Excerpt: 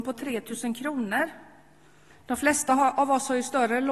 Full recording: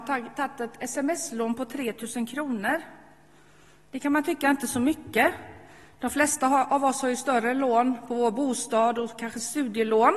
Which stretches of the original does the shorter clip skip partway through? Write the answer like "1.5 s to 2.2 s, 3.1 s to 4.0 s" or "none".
3.6 s to 5.8 s